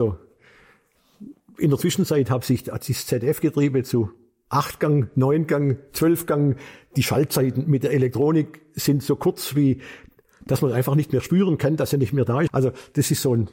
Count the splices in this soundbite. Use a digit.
1